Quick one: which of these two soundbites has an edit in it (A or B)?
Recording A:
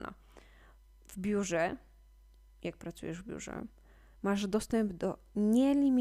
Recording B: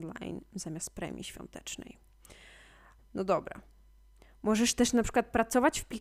B